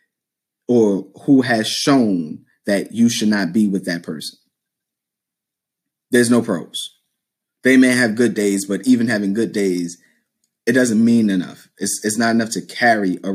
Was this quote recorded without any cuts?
yes; 0 cuts

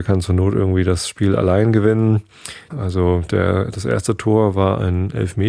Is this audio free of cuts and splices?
no; 1 cut; at 2.7 s

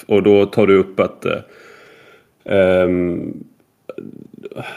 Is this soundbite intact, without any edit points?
yes; 0 cuts

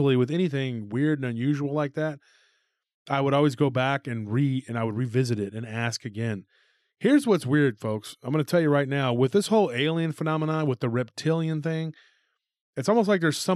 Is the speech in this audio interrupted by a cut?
no; 0 cuts

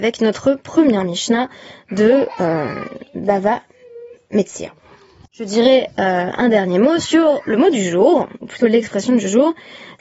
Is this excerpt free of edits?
yes; 0 cuts

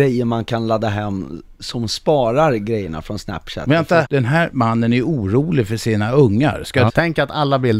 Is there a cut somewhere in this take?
yes; 2 cuts; at 4.0 s, 6.9 s

